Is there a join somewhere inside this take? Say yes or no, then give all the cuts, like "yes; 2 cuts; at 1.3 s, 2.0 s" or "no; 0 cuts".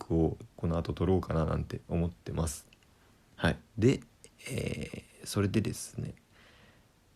yes; 1 cut; at 3.7 s